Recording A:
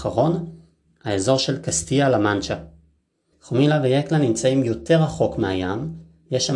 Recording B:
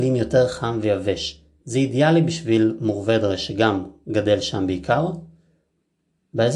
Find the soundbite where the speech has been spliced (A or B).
A